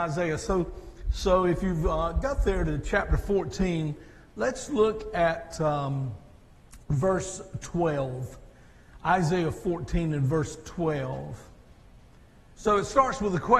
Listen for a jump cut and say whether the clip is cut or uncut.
cut